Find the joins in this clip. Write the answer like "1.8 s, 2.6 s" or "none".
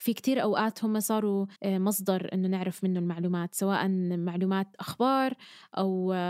1.6 s

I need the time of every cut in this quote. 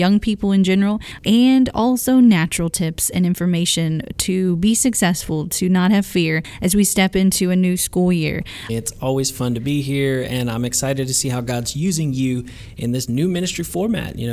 8.7 s

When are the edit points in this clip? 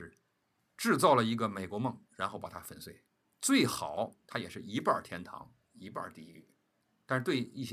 3.2 s

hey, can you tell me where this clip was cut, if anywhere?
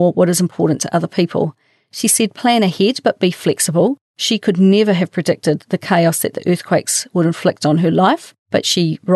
none

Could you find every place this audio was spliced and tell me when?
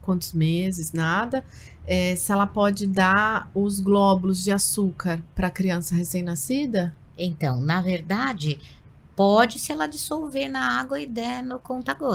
none

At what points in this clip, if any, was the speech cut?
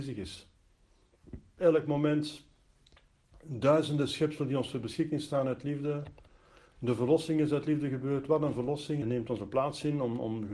1.6 s, 9.0 s

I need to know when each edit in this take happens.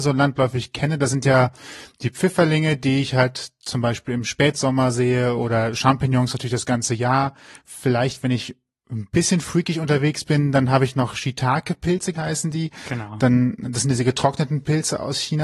12.1 s

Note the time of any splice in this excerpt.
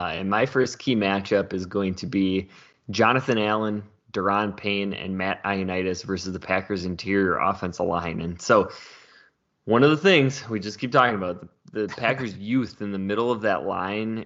none

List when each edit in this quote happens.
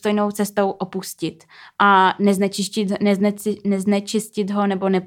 none

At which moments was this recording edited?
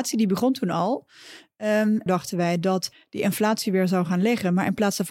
2.1 s

